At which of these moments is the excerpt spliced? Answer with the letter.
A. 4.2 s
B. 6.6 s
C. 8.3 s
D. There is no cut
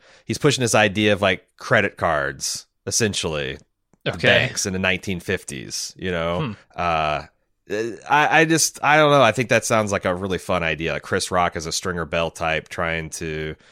B